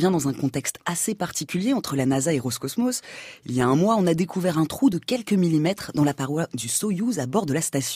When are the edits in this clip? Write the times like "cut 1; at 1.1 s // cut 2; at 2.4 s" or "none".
none